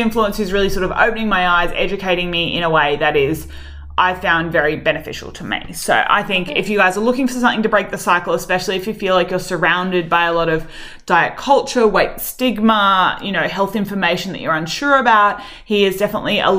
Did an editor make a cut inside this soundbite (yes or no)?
no